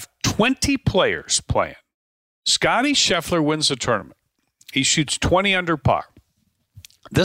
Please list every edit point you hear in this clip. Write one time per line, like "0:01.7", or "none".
none